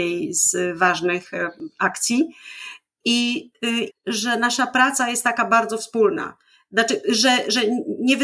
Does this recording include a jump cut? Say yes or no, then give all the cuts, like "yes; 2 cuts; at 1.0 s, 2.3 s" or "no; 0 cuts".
yes; 1 cut; at 3.9 s